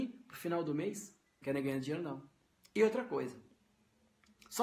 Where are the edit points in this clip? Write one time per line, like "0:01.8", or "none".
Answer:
0:01.4